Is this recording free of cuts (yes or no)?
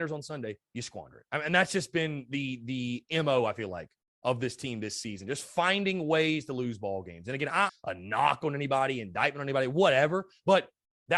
no